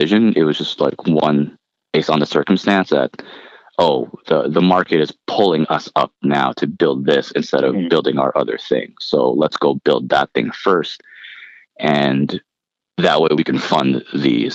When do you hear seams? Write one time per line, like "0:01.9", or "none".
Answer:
none